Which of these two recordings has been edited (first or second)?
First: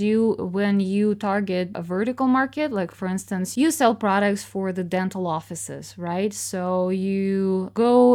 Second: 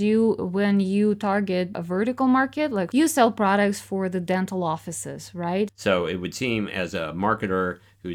second